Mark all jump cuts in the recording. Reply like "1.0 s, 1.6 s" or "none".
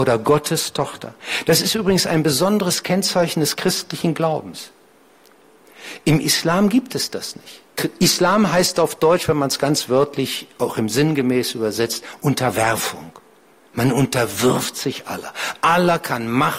none